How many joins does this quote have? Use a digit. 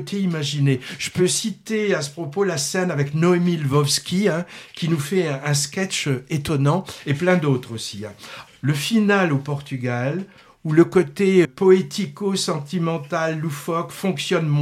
2